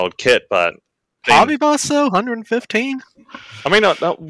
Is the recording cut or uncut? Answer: cut